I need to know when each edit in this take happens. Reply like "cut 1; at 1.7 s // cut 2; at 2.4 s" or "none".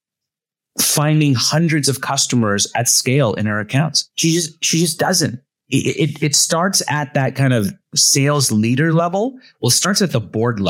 none